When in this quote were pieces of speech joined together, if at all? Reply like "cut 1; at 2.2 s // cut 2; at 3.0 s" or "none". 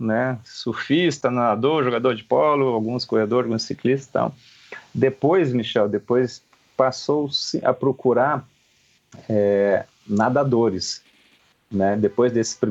none